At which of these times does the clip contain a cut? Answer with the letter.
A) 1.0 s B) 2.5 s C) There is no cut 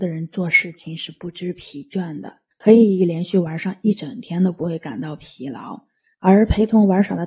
B